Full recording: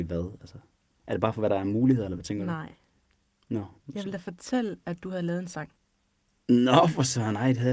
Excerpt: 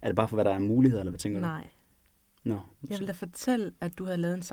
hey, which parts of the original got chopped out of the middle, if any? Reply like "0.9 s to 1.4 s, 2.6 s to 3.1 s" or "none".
none

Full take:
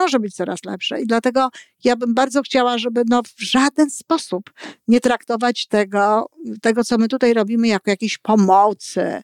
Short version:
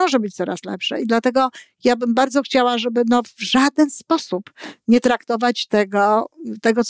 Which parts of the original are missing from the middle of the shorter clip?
none

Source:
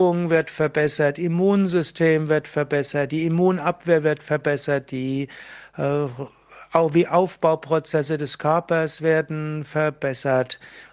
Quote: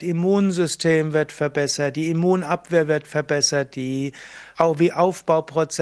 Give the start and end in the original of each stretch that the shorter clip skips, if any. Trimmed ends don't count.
5.7 s to 6.7 s

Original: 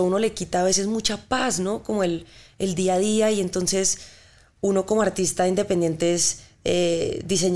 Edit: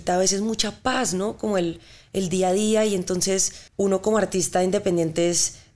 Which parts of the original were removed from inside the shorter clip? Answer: 4.1 s to 4.5 s

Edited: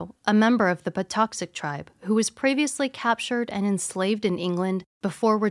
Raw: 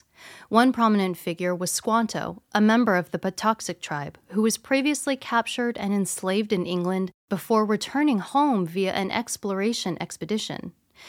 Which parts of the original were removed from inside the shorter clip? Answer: none

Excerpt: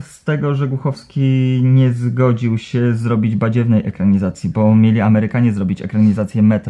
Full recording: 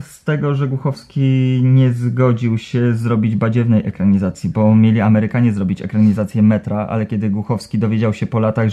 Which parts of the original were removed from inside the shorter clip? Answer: none

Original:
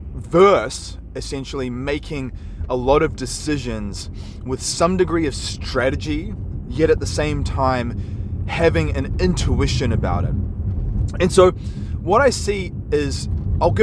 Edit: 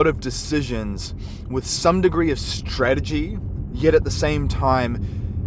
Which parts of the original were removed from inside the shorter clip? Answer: none

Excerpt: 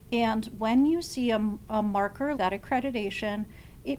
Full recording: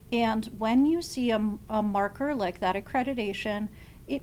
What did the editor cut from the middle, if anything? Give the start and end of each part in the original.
2.3 s to 2.6 s

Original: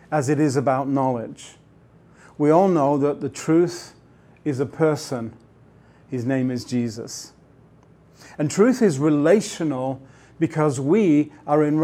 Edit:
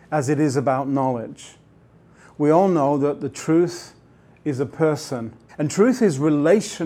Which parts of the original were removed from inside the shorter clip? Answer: 5.5 s to 8.3 s

